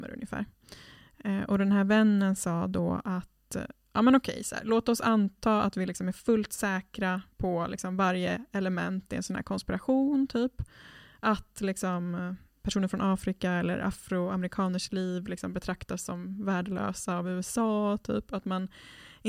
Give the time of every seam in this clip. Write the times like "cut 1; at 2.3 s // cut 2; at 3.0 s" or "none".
cut 1; at 7.3 s